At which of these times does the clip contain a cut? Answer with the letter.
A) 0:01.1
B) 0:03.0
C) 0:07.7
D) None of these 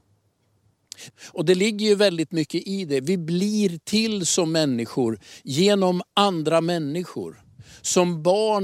A